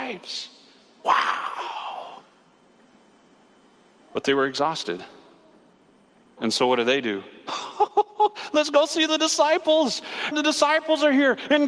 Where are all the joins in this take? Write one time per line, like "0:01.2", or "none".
0:06.4
0:10.3